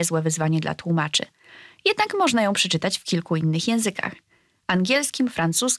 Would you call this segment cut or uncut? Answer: uncut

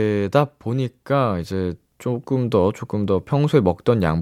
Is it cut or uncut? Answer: uncut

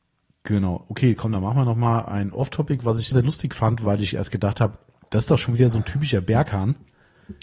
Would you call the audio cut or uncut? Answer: cut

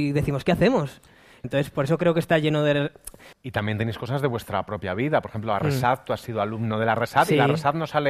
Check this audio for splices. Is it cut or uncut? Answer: cut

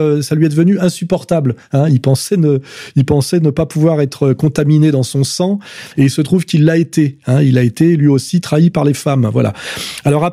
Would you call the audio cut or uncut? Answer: uncut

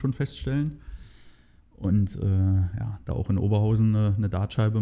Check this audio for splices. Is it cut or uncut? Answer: uncut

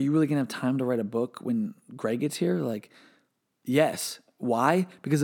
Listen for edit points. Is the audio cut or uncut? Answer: uncut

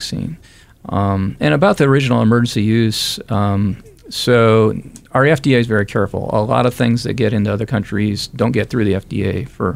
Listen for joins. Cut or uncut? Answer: uncut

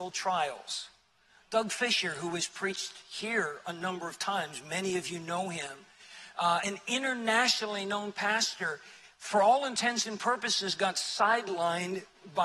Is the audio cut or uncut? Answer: uncut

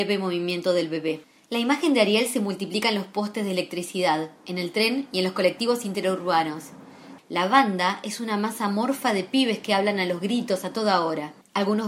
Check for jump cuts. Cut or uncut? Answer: cut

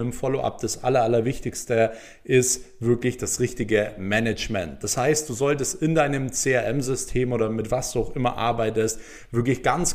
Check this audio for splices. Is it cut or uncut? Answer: uncut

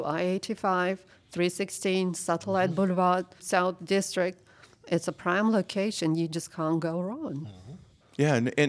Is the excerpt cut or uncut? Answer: cut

